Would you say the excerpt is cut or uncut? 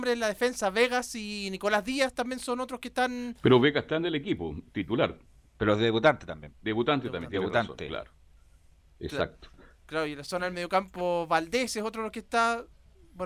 uncut